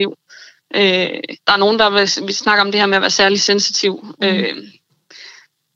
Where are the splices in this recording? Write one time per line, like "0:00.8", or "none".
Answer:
0:01.4